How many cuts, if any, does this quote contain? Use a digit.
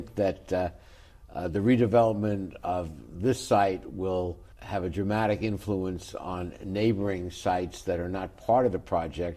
1